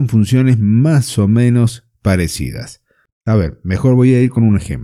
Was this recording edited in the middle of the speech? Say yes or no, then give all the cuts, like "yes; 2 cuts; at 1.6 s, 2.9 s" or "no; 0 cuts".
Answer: no; 0 cuts